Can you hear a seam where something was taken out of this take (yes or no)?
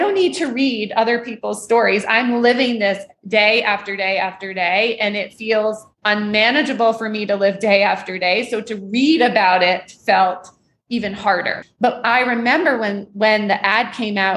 yes